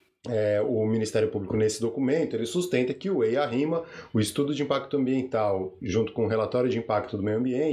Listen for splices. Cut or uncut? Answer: uncut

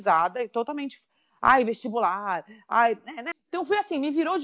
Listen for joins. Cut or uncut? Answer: cut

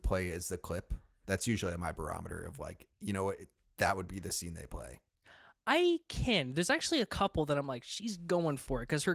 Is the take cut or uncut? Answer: uncut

